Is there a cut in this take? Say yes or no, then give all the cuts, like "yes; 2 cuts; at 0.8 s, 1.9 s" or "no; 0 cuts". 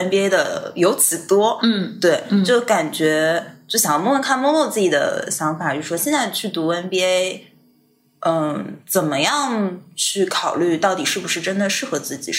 no; 0 cuts